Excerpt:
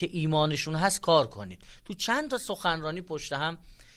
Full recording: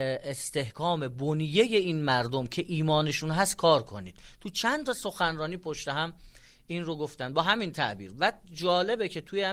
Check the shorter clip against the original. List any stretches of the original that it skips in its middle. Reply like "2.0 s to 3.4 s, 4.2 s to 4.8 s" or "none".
none